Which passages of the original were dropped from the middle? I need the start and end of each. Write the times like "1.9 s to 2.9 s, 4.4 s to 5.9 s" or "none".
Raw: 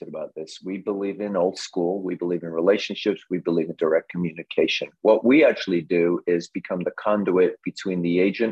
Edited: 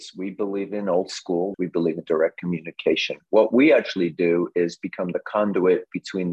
2.0 s to 3.3 s